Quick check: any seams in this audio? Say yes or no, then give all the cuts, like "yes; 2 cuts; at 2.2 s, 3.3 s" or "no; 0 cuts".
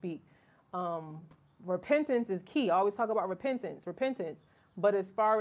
no; 0 cuts